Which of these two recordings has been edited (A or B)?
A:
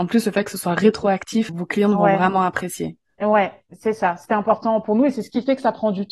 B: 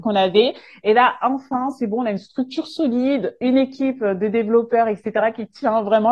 A